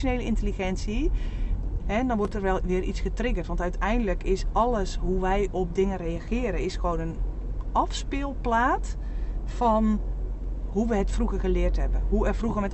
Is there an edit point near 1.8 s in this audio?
yes; 1 cut; at 1.8 s

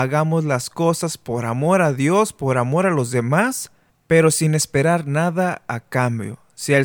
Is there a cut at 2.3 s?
no; 1 cut; at 3.9 s

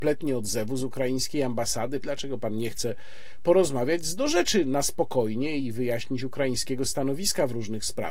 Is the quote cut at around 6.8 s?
no; 1 cut; at 2.0 s

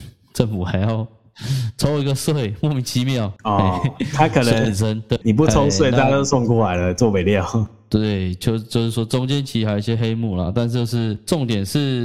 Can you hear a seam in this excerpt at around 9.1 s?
no; 2 cuts; at 3.4 s, 5.2 s

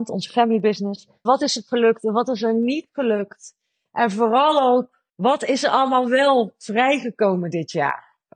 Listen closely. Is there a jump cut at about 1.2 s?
yes; 2 cuts; at 1.2 s, 5.1 s

